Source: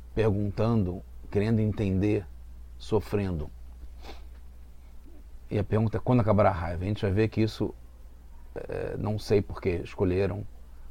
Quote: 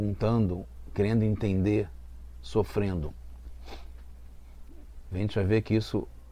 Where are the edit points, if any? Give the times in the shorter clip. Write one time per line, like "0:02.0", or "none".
0:05.1